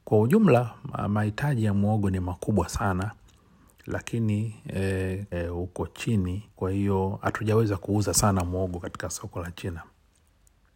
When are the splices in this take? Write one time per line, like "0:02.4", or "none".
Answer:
0:05.3
0:06.5